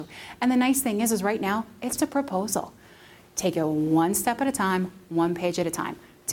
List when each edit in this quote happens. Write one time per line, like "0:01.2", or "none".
0:02.0

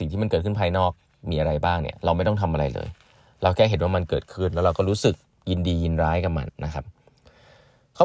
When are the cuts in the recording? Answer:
0:06.5

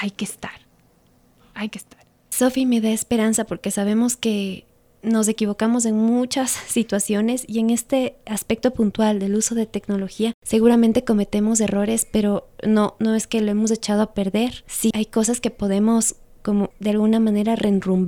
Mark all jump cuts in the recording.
0:14.9
0:16.7

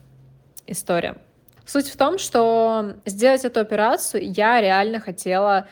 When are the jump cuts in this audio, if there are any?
0:01.6
0:03.0

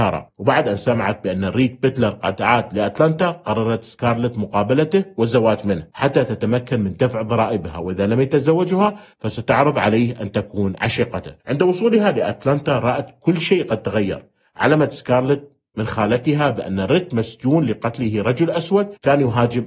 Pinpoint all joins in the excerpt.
0:11.4

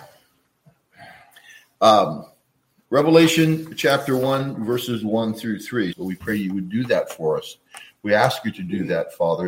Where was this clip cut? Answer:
0:05.9

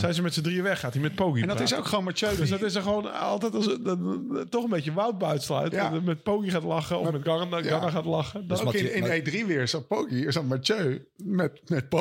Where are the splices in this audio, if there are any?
none

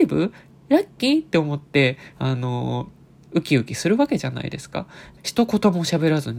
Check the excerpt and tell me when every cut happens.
0:05.2

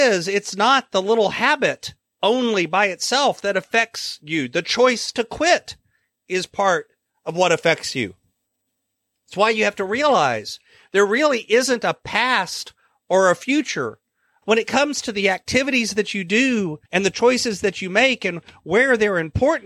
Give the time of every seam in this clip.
0:14.4
0:16.8

